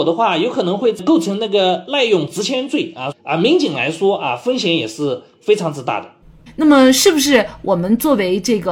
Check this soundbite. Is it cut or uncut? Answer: cut